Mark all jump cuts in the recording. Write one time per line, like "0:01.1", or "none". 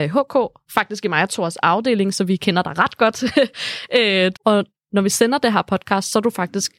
0:04.3